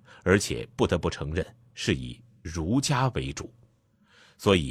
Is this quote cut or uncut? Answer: uncut